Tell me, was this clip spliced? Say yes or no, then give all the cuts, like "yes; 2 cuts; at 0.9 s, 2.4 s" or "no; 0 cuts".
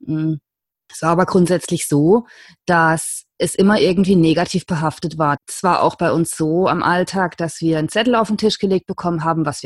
yes; 1 cut; at 5.4 s